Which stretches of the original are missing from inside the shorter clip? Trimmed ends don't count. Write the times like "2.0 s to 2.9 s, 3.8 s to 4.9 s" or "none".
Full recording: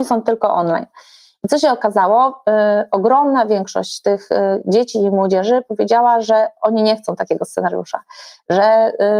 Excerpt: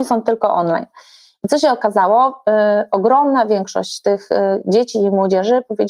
none